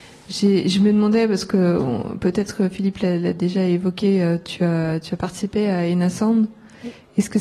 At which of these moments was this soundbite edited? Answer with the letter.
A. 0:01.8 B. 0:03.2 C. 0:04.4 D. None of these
D